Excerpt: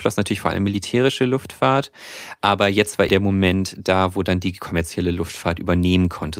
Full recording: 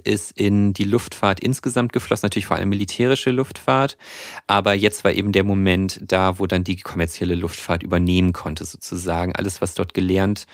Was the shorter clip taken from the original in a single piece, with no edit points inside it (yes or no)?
no